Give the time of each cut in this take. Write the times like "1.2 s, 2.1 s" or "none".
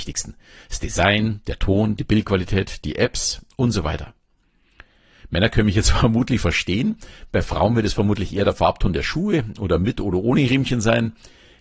none